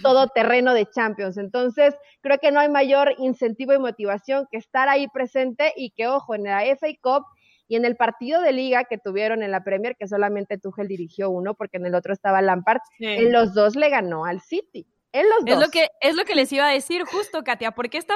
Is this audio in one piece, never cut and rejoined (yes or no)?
yes